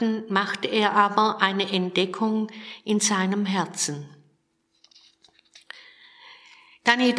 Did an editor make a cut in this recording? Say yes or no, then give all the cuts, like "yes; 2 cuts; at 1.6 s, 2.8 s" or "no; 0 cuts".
no; 0 cuts